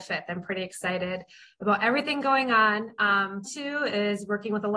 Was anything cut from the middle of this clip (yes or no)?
yes